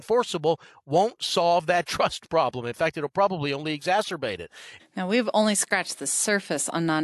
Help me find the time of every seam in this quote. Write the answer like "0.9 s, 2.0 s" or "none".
4.8 s